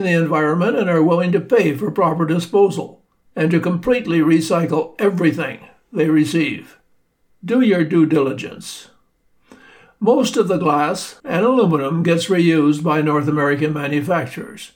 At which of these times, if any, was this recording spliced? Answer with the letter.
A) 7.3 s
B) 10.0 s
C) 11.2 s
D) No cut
C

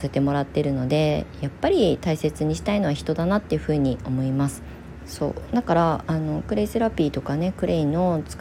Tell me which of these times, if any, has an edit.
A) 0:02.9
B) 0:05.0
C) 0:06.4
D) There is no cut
B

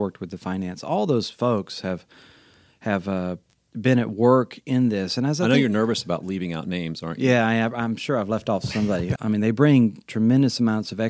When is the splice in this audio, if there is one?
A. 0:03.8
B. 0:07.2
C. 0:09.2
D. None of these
C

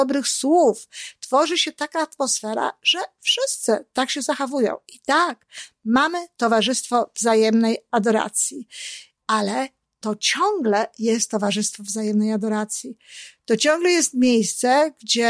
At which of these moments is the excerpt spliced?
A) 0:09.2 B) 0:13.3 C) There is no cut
A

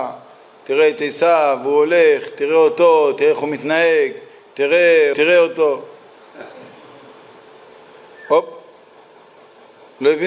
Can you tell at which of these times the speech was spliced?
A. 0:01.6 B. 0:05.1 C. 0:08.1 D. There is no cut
B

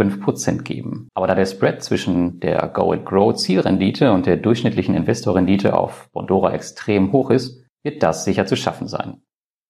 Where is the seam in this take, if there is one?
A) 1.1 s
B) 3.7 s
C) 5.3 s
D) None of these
A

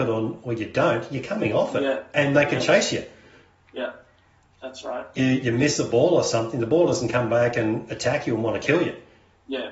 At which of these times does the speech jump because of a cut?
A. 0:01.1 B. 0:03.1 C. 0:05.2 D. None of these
C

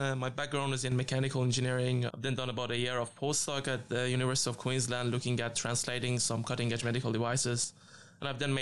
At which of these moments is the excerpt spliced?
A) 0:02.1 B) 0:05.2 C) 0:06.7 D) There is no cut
A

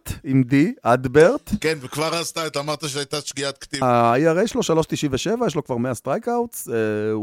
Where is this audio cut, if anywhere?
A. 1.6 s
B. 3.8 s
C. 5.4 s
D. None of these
B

